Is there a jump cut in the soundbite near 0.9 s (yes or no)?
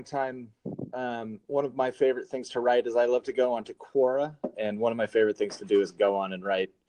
no